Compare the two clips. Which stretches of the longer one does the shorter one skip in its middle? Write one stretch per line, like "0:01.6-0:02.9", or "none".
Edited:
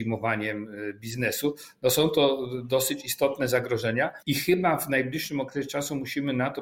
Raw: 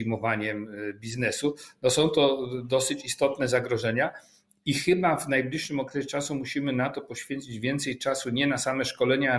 0:04.2-0:04.6